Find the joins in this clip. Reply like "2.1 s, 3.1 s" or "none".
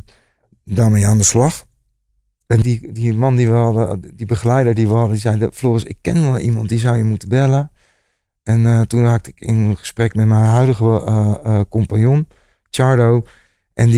none